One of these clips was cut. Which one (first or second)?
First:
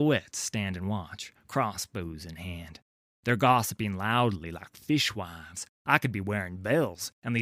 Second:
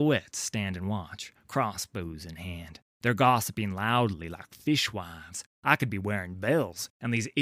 second